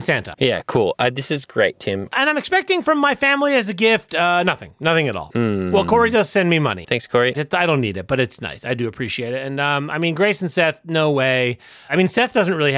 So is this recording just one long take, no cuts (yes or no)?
no